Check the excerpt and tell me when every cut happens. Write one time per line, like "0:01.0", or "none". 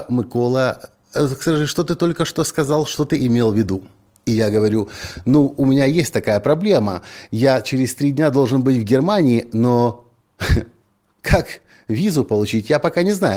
none